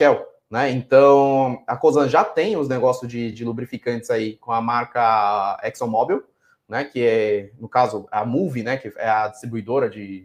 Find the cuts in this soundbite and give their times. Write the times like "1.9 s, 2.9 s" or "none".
none